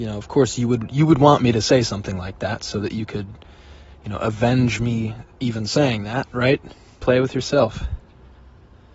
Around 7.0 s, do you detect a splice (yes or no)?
yes